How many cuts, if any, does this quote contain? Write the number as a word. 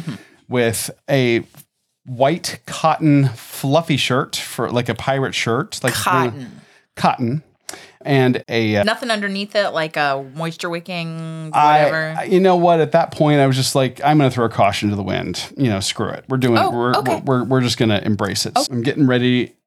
two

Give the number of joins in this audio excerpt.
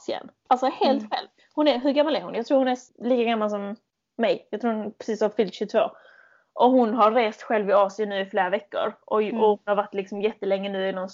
one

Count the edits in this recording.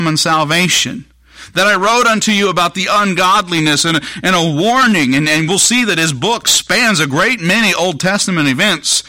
one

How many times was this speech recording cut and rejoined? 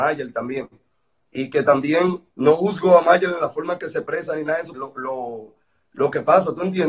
two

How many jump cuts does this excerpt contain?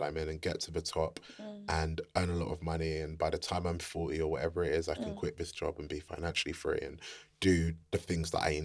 zero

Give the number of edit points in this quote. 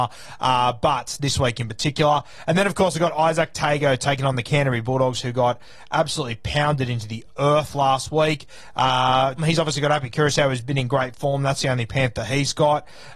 one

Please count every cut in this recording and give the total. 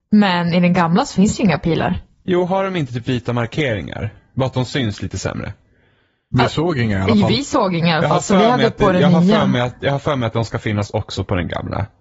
zero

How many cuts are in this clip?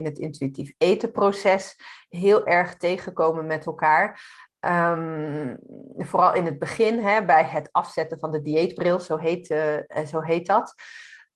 zero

